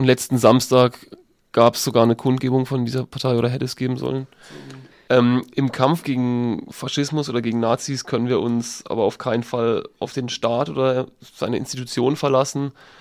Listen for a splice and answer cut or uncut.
cut